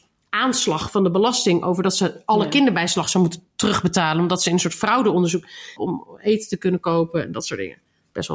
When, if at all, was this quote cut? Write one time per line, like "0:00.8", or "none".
0:05.8